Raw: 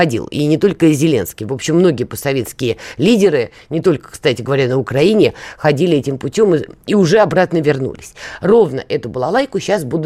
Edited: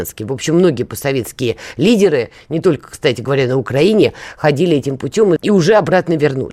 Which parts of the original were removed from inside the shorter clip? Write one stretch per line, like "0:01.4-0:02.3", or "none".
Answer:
0:06.6-0:06.8